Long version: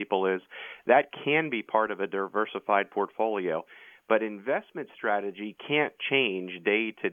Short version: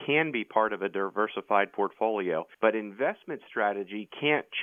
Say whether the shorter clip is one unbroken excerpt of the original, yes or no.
no